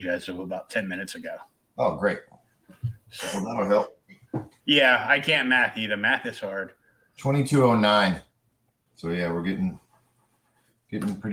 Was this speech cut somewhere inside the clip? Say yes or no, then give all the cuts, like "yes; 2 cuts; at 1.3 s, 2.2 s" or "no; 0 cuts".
yes; 2 cuts; at 4.6 s, 8.9 s